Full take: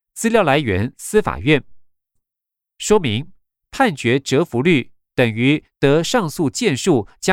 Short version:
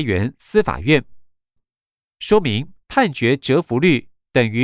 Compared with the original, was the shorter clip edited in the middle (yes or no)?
yes